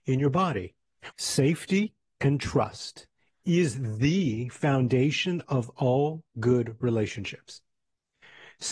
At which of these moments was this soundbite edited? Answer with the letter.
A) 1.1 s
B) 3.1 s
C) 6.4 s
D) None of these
A